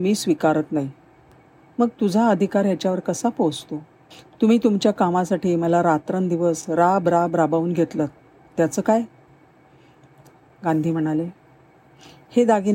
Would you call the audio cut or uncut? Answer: uncut